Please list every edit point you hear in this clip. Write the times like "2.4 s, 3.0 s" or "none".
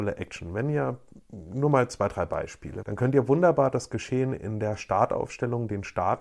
2.8 s